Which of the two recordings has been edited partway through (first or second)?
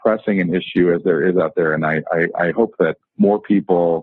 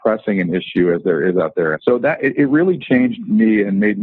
second